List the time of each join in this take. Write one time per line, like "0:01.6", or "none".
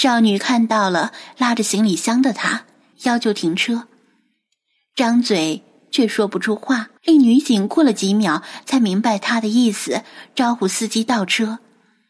0:02.9
0:07.0